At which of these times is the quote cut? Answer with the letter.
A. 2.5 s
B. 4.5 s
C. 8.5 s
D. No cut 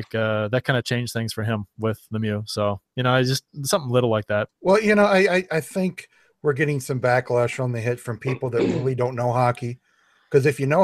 B